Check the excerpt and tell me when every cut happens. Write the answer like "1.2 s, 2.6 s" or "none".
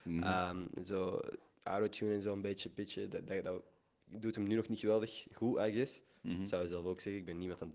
none